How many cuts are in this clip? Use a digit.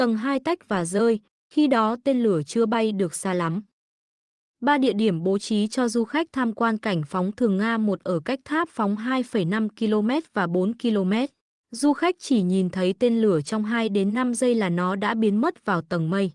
0